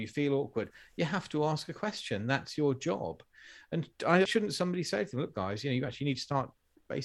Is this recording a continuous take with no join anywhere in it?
no; 1 cut; at 4.3 s

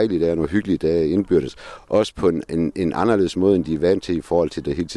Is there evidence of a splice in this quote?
no; 0 cuts

